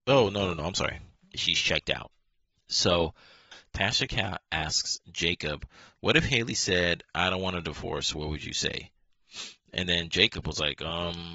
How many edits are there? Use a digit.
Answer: 1